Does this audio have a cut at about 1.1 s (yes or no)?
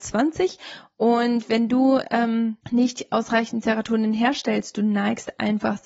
no